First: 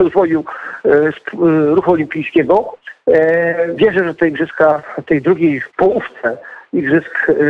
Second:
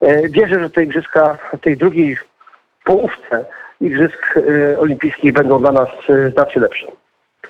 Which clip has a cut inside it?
first; 2 cuts; at 3.8 s, 5.7 s

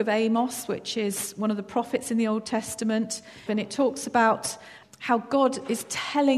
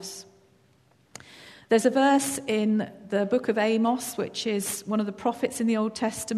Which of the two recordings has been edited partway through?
first; 2 cuts; at 3.5 s, 4.8 s

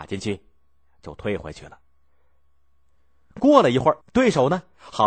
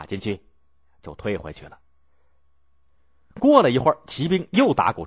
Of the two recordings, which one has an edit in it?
first; 1 cut; at 4.0 s

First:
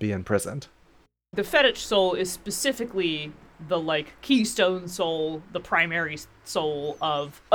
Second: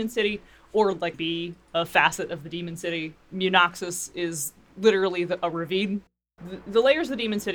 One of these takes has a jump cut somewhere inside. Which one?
second; 1 cut; at 1.1 s

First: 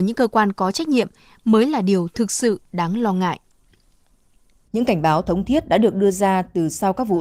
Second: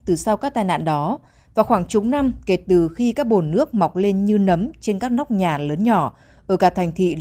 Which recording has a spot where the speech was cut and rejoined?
first; 1 cut; at 4.7 s

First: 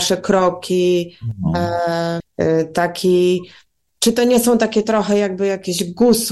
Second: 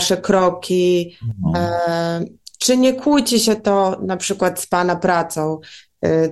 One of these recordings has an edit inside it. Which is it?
first; 1 cut; at 2.2 s

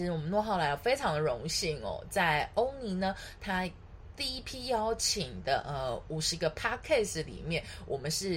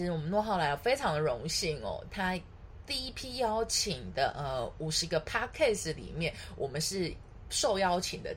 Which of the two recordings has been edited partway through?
second; 1 cut; at 2.1 s

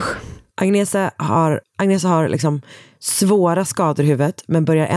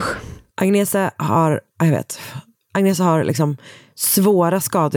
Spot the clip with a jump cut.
first; 1 cut; at 1.6 s

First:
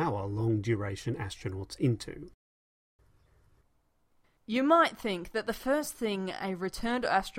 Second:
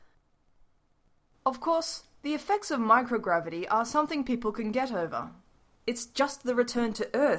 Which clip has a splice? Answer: second; 1 cut; at 5.8 s

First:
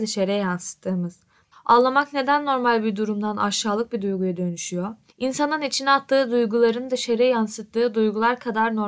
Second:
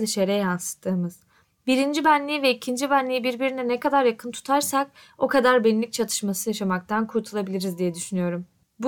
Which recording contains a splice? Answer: first; 2 cuts; at 1.5 s, 5.1 s

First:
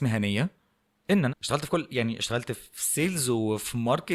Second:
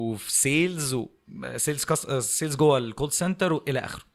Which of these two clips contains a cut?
first; 1 cut; at 1.3 s

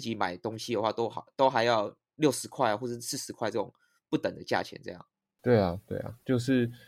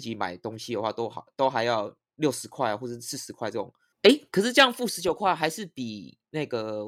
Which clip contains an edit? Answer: second; 1 cut; at 3.9 s

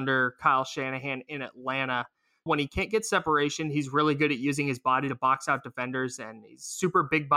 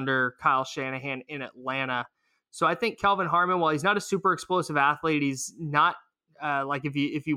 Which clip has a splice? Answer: first; 1 cut; at 2.5 s

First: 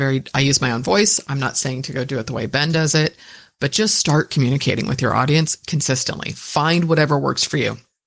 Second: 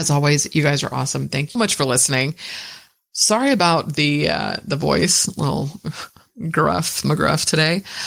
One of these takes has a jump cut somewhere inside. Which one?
second; 1 cut; at 1.6 s

